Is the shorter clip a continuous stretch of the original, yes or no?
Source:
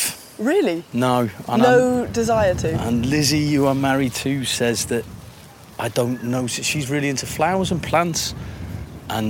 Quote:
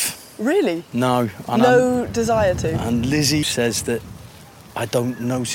no